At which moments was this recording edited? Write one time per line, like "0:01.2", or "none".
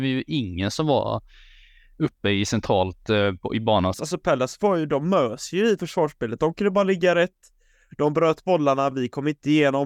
0:03.9